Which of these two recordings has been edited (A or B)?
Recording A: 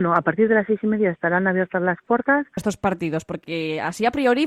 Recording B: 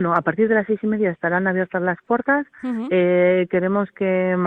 A